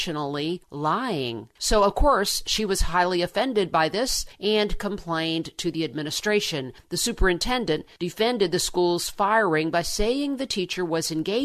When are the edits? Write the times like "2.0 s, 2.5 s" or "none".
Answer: 1.6 s